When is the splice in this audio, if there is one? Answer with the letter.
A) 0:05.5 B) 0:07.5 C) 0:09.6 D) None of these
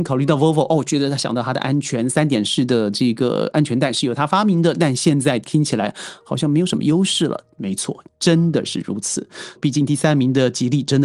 C